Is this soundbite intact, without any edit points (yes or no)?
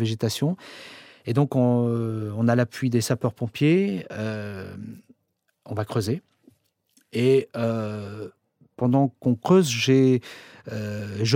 yes